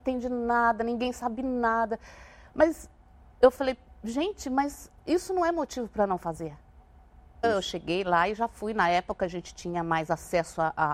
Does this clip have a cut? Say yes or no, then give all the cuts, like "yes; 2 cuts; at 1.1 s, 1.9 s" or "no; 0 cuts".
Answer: yes; 2 cuts; at 5.0 s, 7.4 s